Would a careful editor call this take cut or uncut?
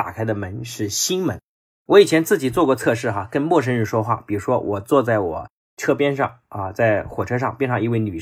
uncut